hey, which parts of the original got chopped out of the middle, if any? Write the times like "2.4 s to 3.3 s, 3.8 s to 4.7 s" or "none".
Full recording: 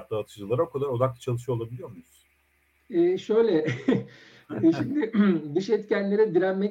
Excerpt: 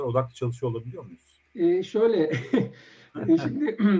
2.3 s to 2.8 s